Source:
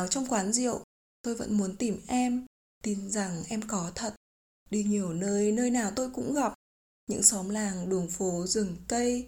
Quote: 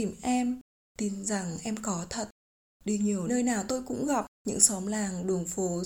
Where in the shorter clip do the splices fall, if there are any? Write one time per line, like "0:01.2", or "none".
0:03.3
0:04.3